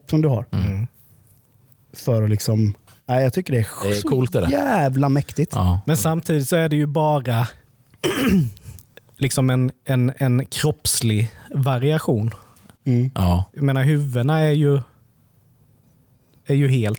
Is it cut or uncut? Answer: uncut